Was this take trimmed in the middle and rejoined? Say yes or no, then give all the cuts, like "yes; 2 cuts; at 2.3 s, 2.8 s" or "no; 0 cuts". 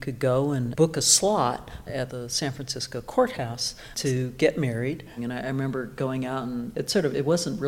yes; 1 cut; at 5.2 s